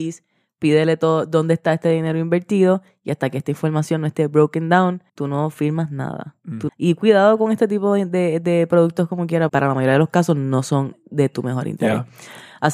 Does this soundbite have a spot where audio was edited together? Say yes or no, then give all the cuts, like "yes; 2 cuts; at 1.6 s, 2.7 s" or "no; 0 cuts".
yes; 3 cuts; at 5.1 s, 6.7 s, 9.5 s